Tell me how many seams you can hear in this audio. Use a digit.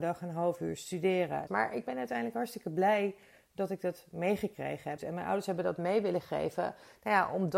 2